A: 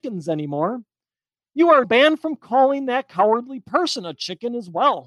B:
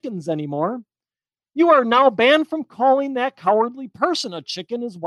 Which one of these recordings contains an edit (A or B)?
A